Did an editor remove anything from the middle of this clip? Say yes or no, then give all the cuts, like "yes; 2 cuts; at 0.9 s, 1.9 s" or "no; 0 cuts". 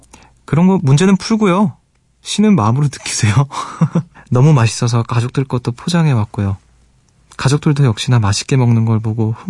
yes; 1 cut; at 4.1 s